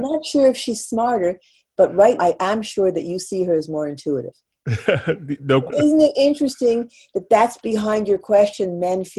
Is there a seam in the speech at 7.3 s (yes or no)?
no